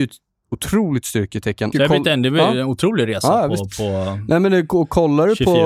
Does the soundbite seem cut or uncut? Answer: cut